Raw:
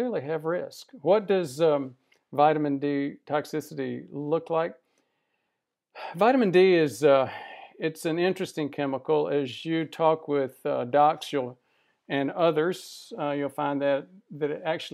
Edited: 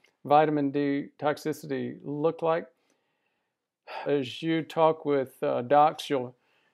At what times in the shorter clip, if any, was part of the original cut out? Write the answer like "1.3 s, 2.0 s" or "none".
4.1 s